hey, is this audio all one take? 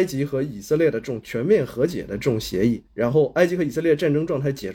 no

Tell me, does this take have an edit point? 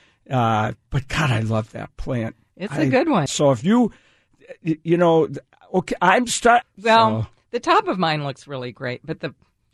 yes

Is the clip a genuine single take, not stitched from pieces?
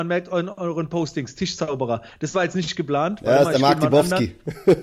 yes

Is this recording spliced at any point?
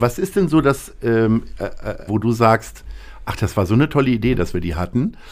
yes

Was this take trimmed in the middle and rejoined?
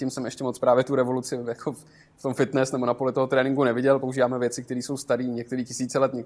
no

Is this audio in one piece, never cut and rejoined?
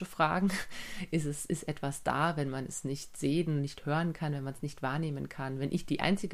yes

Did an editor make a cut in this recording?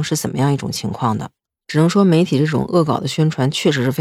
no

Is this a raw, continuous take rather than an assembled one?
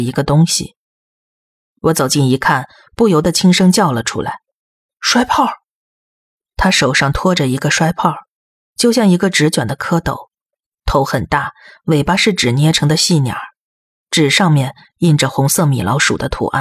yes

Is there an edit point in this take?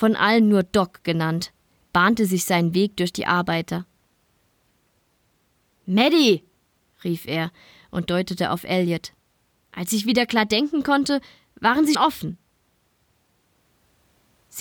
yes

